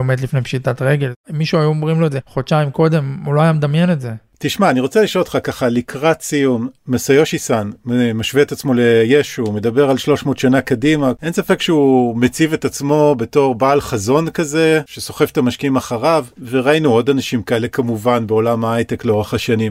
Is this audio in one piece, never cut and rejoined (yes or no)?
yes